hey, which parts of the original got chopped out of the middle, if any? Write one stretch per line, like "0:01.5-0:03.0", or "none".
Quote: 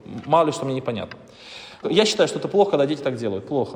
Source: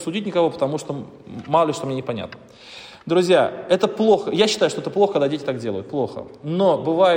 0:03.0-0:04.2

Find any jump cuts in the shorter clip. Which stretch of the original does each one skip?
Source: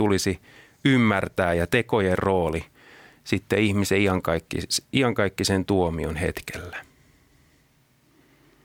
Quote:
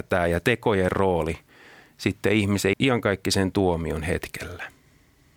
0:04.0-0:04.9

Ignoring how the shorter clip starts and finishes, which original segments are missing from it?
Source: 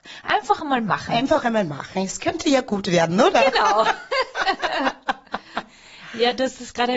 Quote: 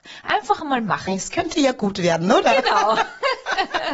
0:01.1-0:02.0

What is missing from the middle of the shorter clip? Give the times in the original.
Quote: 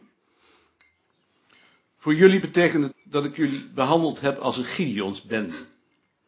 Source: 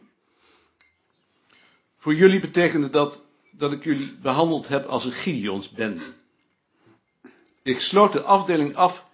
0:02.9-0:03.4

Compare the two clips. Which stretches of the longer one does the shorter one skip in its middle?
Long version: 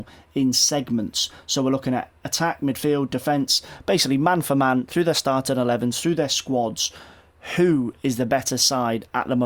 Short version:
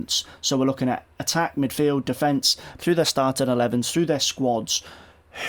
0:03.8-0:04.9

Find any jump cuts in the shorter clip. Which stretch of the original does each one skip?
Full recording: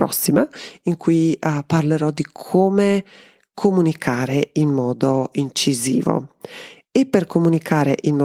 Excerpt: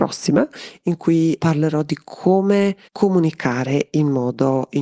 0:01.4-0:01.7
0:03.1-0:03.5

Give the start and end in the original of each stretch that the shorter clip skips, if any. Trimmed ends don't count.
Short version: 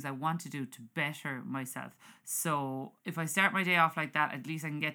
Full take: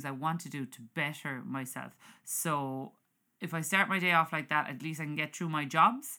0:03.0-0:03.3

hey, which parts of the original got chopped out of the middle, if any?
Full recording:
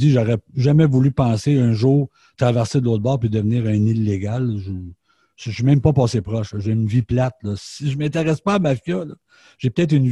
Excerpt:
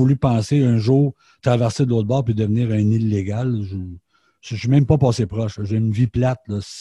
none

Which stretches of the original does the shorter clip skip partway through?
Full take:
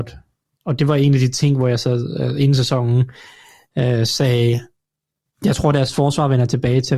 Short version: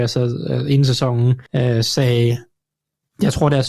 0:03.2-0:03.7

